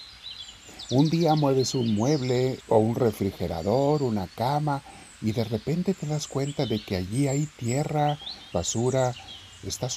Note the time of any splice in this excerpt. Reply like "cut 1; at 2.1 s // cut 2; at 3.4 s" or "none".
cut 1; at 2.6 s // cut 2; at 8.5 s